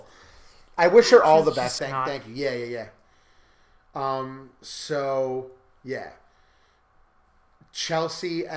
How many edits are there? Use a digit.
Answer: 1